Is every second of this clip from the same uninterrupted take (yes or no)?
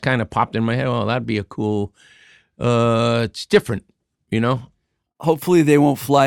yes